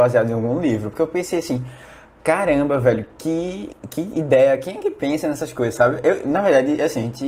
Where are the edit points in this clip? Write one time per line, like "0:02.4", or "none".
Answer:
none